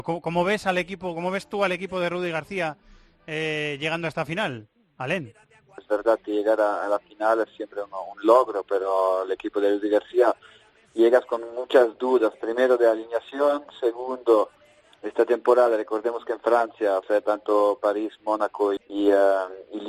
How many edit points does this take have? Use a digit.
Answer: 3